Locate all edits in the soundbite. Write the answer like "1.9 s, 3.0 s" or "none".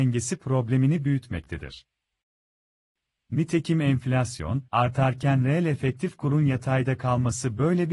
4.7 s